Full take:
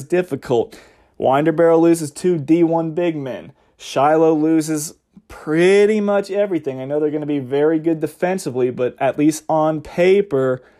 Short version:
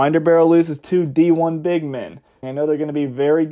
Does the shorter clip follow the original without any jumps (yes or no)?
no